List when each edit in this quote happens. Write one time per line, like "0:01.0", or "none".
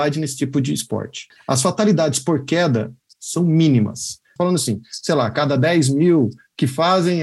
0:04.4